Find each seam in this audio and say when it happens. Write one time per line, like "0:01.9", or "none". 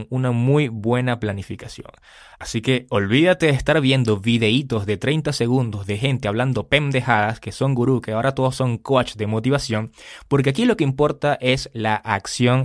none